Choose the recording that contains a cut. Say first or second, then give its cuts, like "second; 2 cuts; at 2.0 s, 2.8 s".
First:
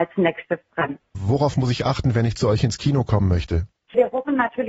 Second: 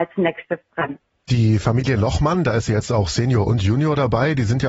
first; 1 cut; at 1.1 s